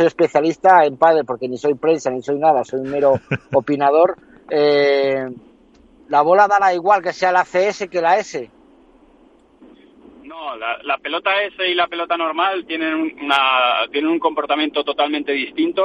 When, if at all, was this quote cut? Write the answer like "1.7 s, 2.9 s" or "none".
none